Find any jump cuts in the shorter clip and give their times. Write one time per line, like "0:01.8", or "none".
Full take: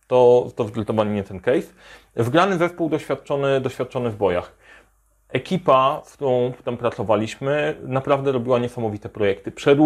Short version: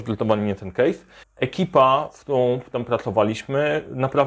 0:01.2